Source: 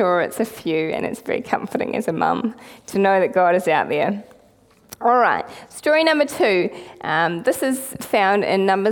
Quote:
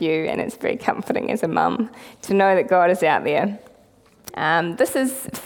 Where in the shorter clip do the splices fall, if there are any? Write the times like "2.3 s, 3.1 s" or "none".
4.3 s